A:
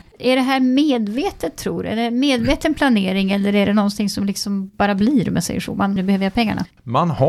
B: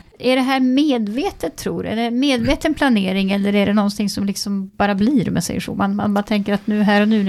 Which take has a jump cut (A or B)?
A